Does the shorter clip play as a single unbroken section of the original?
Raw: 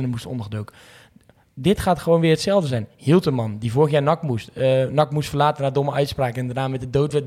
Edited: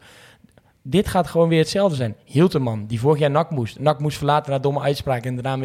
no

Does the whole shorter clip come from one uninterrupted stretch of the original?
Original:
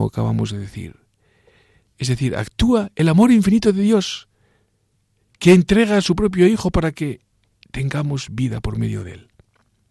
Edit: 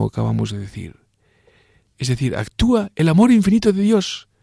yes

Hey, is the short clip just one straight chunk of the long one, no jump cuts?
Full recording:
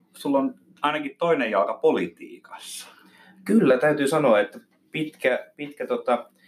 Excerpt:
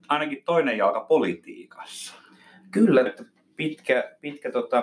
no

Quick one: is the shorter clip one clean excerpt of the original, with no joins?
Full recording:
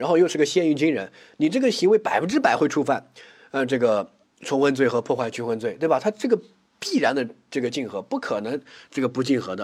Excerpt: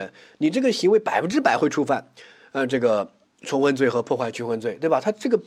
yes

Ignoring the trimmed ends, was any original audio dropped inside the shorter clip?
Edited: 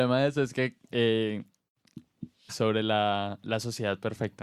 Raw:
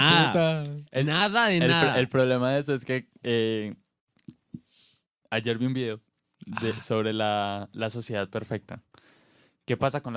yes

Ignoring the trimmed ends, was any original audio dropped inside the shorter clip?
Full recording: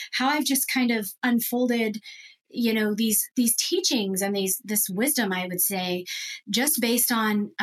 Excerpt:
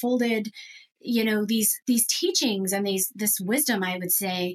no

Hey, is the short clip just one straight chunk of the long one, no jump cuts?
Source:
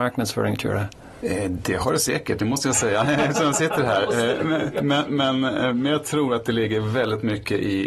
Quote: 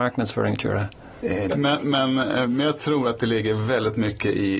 no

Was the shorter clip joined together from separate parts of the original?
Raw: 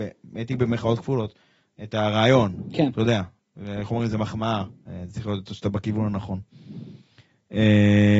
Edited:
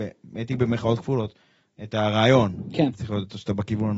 yes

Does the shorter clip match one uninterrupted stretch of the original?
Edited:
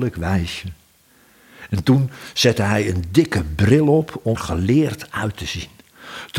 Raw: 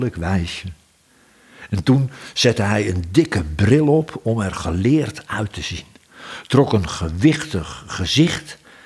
no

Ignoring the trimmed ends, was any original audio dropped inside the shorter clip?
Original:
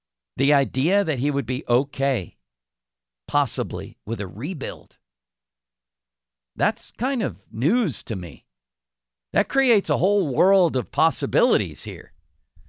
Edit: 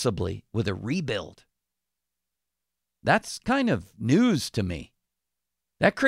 no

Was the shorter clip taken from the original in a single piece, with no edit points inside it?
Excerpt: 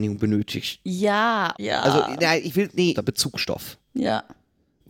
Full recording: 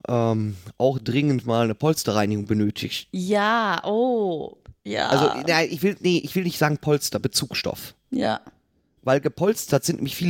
no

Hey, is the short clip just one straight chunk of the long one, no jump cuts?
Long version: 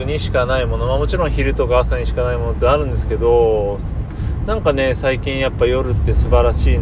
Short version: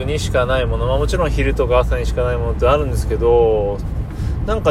yes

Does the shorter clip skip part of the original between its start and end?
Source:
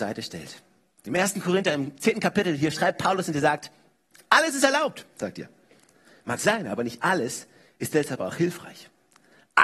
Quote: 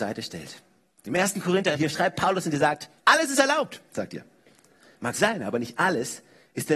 yes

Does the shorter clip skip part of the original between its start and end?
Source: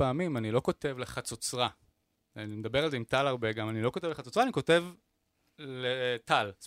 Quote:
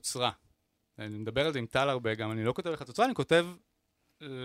no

